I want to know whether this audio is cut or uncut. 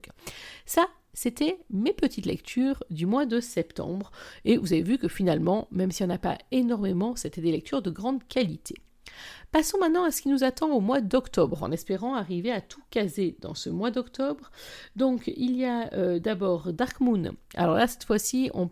uncut